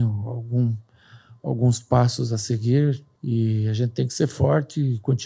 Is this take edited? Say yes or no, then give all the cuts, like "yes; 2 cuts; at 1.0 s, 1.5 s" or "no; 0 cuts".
yes; 1 cut; at 3.2 s